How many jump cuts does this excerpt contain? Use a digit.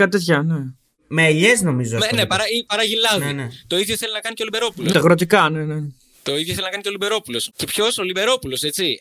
2